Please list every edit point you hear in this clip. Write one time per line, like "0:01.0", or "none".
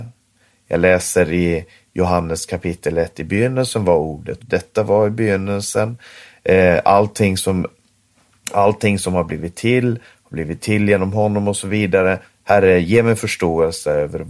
0:04.4
0:12.3